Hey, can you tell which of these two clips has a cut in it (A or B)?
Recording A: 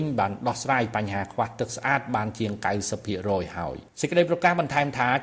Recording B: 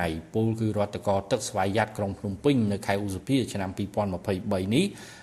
A